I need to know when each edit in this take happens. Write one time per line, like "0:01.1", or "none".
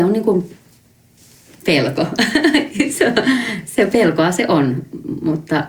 none